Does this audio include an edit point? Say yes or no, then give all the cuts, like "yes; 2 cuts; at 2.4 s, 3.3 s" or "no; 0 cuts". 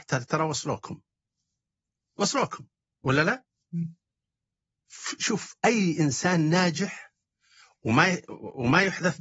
no; 0 cuts